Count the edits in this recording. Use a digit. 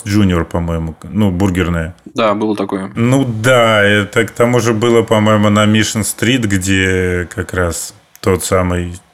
1